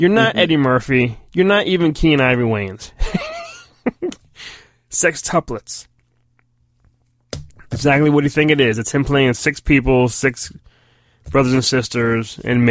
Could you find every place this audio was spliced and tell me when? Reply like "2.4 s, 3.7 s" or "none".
none

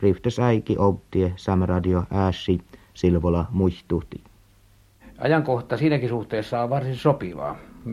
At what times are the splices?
none

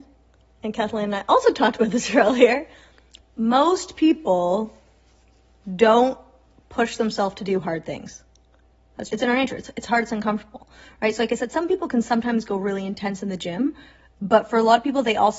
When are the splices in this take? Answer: 9.1 s

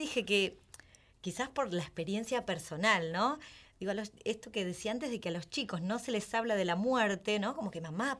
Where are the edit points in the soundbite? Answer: none

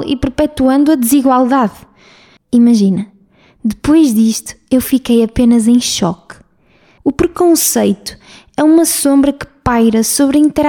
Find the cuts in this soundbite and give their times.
2.4 s, 7.0 s

